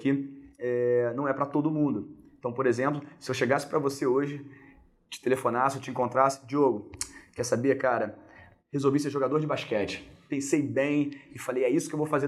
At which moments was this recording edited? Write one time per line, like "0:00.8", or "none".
none